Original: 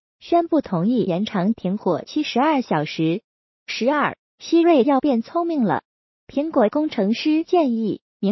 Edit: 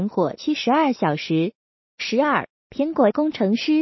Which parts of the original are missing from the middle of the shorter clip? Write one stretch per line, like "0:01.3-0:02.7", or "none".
0:04.3-0:06.2